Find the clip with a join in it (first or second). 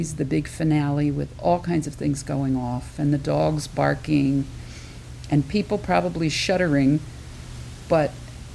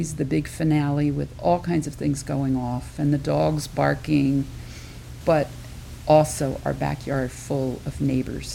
second